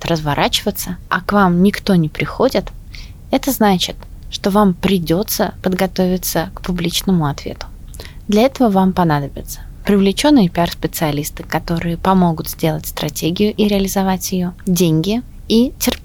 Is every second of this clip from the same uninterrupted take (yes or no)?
yes